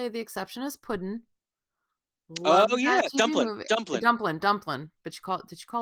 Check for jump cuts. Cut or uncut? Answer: uncut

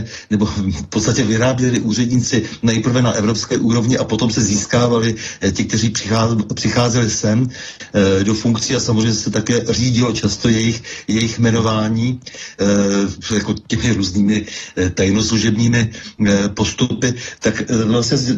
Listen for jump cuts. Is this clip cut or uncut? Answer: uncut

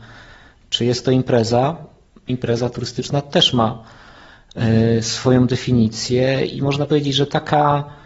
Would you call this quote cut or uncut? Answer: cut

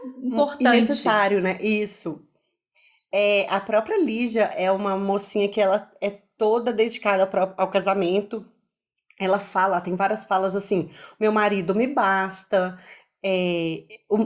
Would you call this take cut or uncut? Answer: uncut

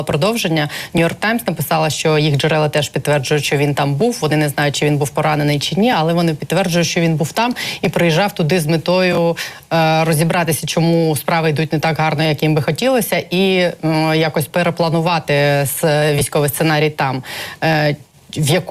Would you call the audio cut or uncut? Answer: uncut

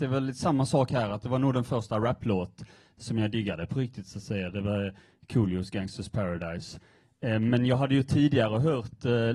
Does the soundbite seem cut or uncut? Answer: cut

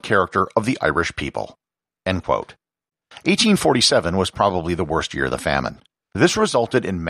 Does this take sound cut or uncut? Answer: cut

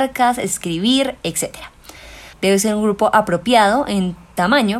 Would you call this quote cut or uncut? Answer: cut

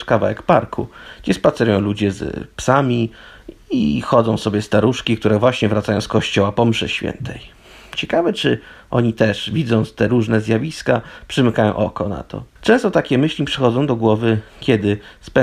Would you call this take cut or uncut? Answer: cut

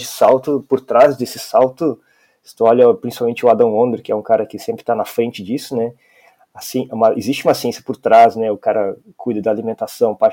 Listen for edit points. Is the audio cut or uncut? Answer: uncut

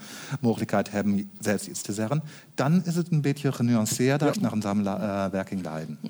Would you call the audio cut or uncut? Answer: cut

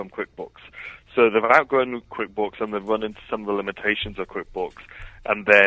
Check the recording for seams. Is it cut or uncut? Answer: uncut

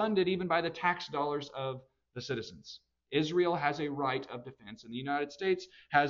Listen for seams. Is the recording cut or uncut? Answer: uncut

